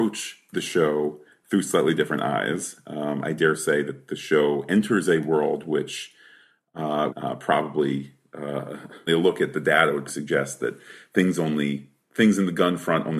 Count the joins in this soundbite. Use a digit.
3